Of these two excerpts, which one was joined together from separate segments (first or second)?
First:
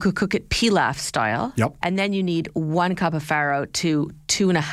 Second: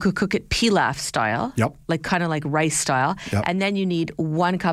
first